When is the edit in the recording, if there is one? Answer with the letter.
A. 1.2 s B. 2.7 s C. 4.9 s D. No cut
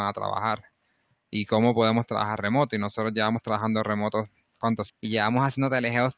C